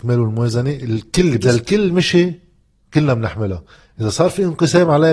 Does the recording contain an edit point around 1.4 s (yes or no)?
yes